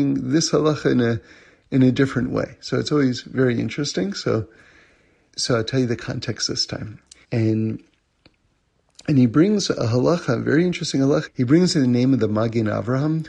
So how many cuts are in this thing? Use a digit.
3